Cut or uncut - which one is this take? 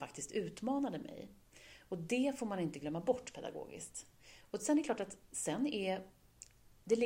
uncut